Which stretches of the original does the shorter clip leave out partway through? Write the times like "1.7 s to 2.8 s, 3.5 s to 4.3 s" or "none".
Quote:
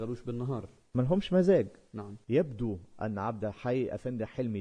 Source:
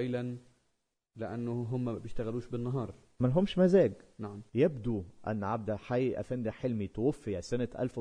none